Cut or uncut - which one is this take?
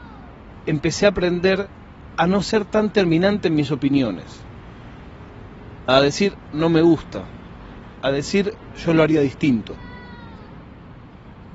cut